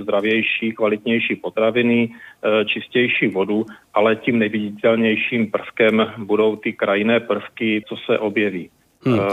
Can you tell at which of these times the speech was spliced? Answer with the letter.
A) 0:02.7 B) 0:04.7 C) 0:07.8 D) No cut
C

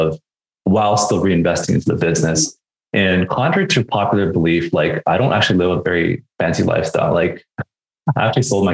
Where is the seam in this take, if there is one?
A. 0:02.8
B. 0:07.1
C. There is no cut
C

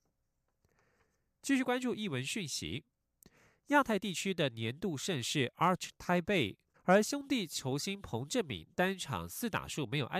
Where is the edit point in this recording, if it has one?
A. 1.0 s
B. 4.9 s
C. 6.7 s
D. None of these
C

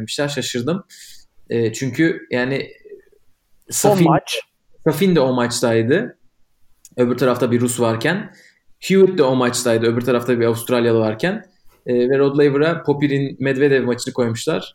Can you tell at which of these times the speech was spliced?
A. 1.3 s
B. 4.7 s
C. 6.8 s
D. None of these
D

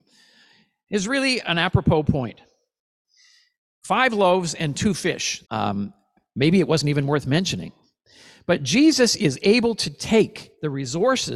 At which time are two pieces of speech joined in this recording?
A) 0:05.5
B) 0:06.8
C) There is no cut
A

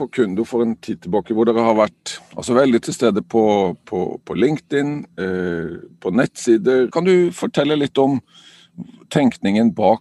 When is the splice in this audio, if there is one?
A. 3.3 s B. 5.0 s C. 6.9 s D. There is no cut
C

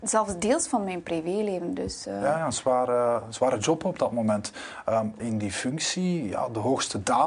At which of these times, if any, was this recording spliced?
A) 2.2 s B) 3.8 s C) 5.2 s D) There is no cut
C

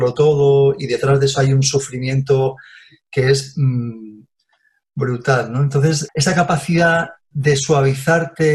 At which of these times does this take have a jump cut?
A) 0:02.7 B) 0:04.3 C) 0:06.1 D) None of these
C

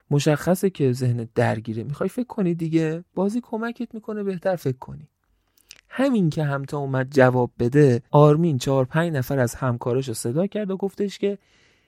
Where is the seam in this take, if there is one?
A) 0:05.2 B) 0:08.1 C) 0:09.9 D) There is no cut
B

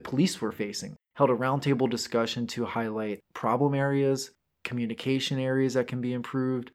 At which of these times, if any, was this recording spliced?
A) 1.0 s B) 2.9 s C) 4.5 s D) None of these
A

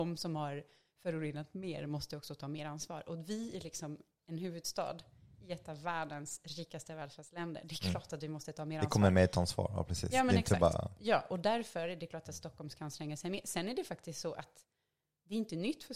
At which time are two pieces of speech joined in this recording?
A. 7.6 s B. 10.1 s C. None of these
C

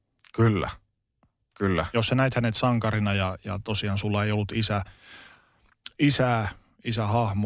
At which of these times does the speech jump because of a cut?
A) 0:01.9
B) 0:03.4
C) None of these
C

